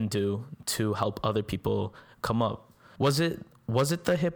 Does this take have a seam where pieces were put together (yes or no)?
yes